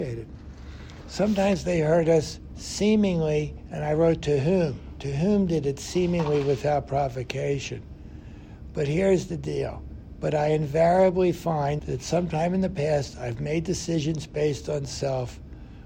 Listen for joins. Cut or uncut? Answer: cut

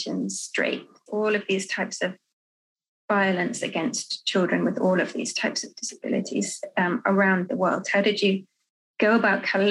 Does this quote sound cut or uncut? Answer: cut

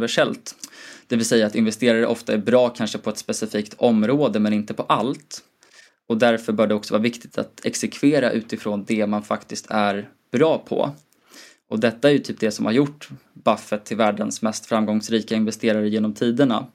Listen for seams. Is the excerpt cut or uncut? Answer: uncut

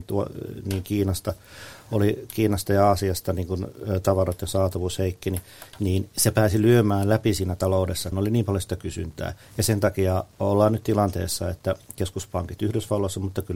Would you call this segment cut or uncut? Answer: cut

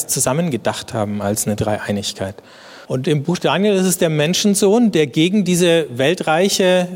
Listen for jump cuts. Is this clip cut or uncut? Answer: cut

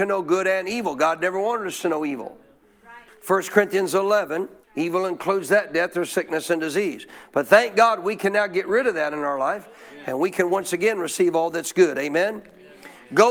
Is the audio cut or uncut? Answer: cut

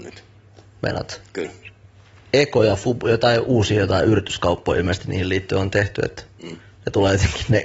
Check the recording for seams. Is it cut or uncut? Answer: uncut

